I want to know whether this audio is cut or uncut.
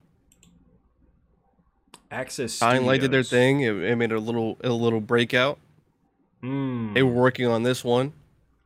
uncut